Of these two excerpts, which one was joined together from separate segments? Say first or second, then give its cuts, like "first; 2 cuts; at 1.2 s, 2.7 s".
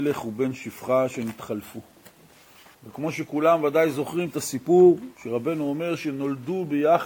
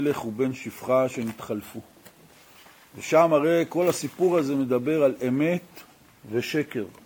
first; 2 cuts; at 2.7 s, 5.1 s